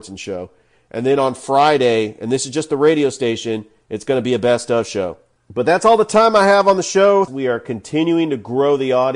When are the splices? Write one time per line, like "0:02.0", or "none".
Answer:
0:07.3

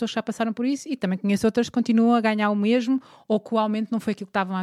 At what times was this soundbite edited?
none

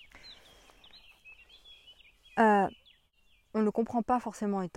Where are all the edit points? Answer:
none

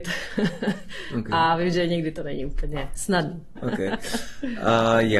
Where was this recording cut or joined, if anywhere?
0:03.6

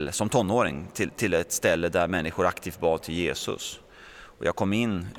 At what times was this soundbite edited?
none

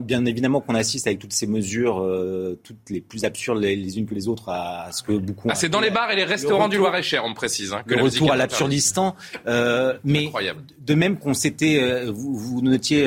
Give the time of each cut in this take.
none

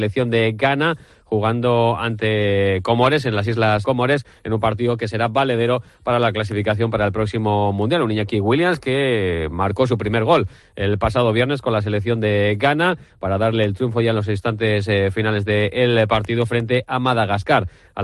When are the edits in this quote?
0:03.8

